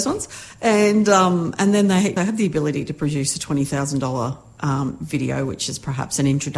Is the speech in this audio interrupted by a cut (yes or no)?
yes